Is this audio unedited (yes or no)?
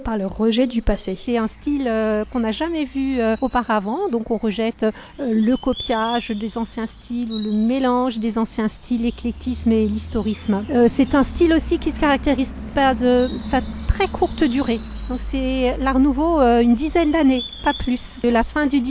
yes